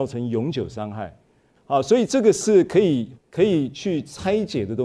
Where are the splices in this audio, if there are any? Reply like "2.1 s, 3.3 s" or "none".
1.6 s, 3.2 s

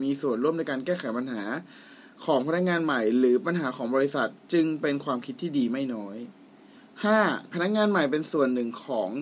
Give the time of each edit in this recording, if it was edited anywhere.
7.5 s

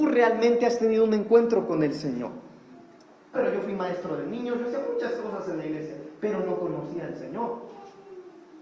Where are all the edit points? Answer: 3.3 s

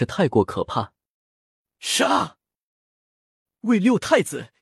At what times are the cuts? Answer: 1.2 s

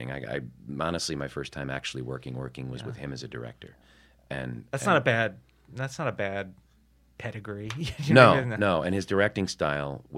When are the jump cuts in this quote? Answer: none

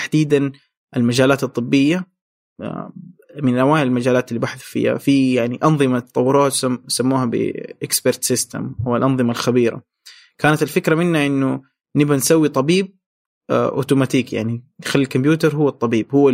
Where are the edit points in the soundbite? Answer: none

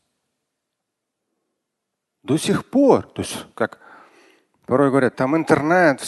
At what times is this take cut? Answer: 5.1 s

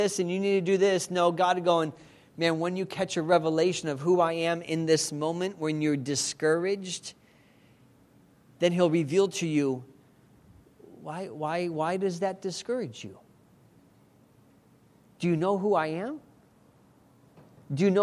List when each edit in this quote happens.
none

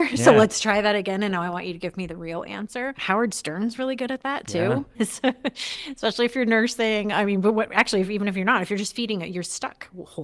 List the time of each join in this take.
4.9 s

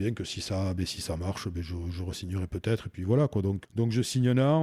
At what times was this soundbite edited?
3.6 s

